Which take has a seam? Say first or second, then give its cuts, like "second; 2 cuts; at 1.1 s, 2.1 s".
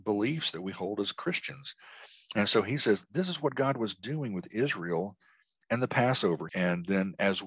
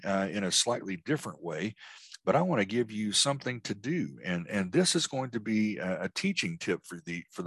first; 1 cut; at 6.5 s